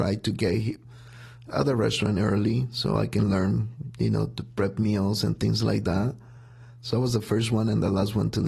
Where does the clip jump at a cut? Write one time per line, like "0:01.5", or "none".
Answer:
none